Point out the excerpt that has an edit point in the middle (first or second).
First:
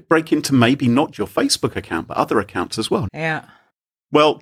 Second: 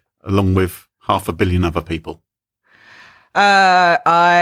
first